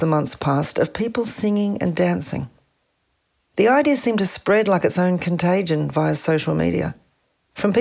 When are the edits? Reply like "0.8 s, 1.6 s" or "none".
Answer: none